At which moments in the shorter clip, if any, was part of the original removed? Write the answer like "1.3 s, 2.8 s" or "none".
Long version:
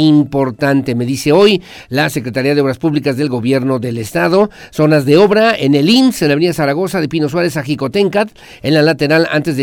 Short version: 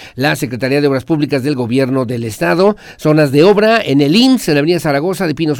none